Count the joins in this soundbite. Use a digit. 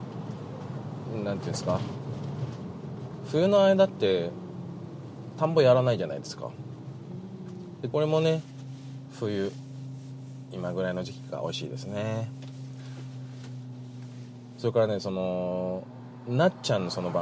1